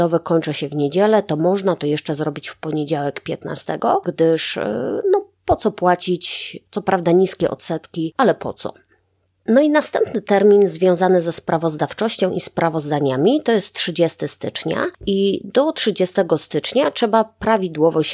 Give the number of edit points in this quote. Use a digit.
1